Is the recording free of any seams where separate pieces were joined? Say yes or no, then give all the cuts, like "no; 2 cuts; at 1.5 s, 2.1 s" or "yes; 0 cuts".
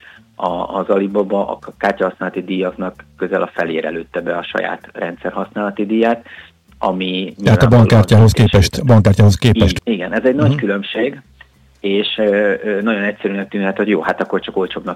no; 1 cut; at 9.8 s